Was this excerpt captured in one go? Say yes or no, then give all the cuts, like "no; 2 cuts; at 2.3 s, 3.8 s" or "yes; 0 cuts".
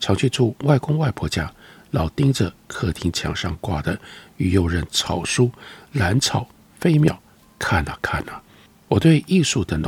yes; 0 cuts